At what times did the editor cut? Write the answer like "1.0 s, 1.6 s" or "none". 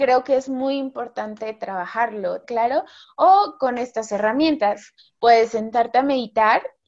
2.4 s